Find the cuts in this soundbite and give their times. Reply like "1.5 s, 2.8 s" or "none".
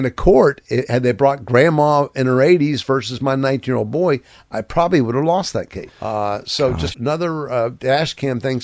5.9 s, 6.9 s

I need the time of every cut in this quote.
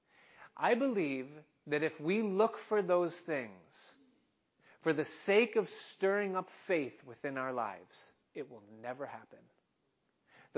none

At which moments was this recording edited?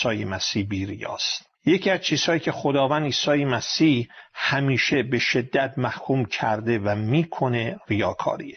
1.5 s

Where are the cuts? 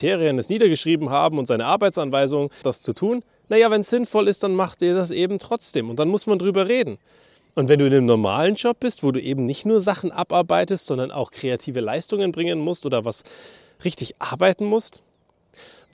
2.6 s

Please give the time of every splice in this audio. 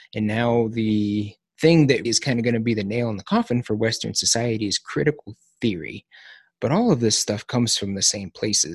2.0 s

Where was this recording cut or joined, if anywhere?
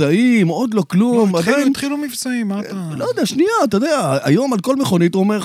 none

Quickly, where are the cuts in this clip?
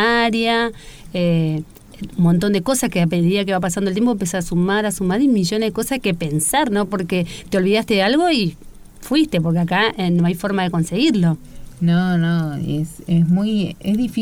none

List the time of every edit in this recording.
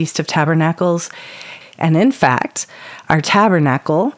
1.6 s

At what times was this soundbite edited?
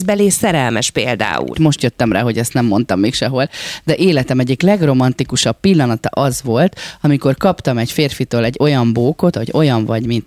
1.5 s, 9.3 s

